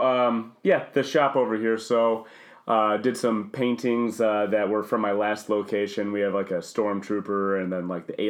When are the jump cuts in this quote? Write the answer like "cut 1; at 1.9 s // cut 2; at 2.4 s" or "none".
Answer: none